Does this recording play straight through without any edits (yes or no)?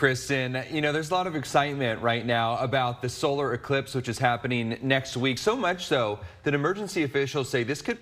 yes